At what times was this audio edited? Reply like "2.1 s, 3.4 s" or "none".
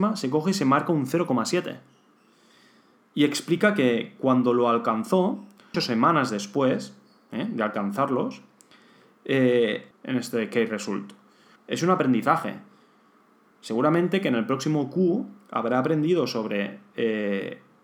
5.7 s, 9.9 s, 11.6 s

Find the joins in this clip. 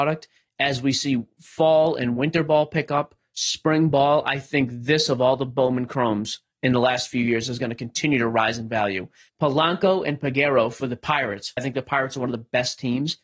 9.3 s, 11.6 s

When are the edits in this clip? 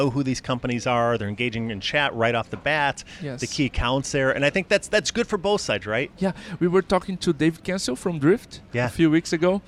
6.1 s

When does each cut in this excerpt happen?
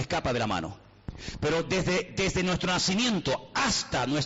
none

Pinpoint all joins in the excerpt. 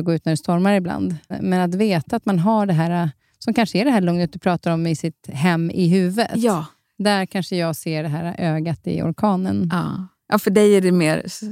1.3 s

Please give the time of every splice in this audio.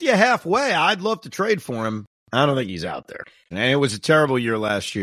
3.5 s

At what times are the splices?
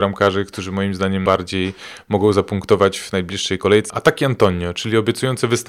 1.3 s, 3.9 s

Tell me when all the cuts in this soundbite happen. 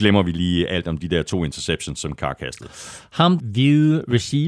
3.4 s

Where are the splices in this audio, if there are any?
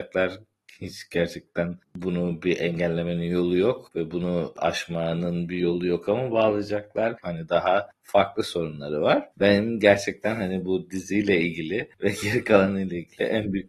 7.2 s, 9.3 s

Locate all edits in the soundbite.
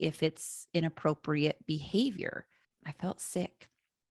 2.6 s

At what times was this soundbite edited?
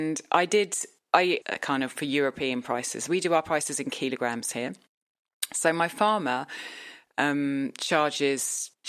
1.4 s

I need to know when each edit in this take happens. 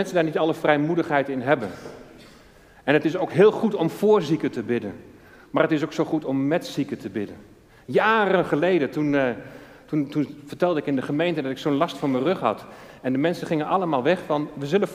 none

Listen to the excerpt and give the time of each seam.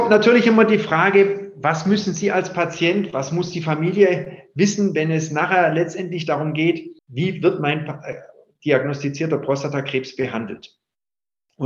7.0 s

